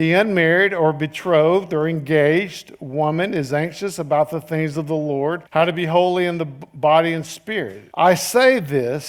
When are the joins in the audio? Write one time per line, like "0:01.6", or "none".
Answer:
0:05.5
0:07.9

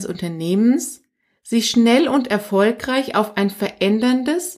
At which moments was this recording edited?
none

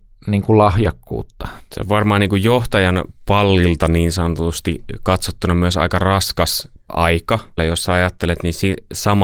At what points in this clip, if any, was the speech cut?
0:01.6
0:07.6

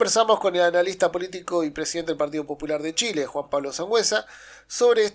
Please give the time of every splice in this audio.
none

